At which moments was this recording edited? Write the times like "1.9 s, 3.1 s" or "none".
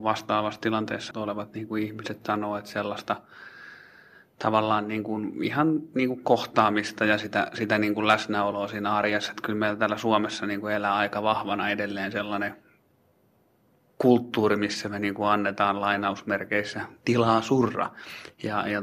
1.1 s

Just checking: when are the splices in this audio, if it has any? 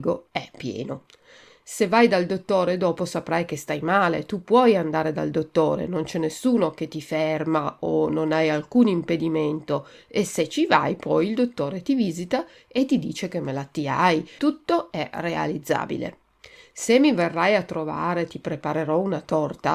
14.4 s

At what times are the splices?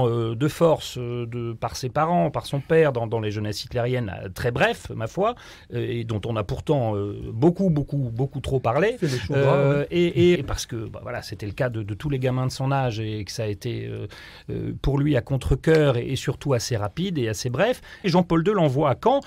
10.3 s, 18.0 s

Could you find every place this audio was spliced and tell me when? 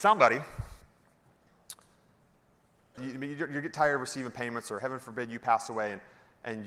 3.0 s

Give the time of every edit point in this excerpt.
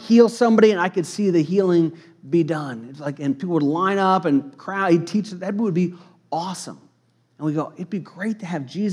none

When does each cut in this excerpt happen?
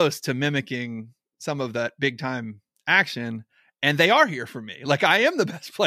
none

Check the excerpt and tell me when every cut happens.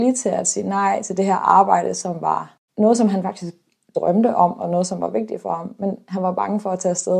none

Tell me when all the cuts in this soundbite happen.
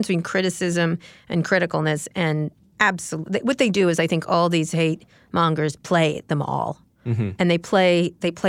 none

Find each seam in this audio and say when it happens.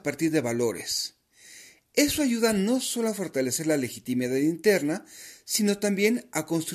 none

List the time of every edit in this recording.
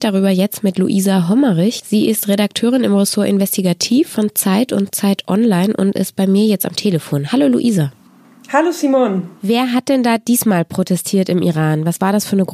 none

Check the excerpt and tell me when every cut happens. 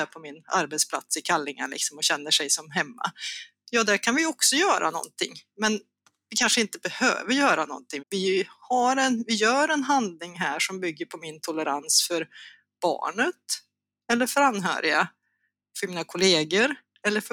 8.0 s

